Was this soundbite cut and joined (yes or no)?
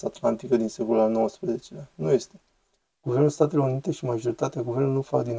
yes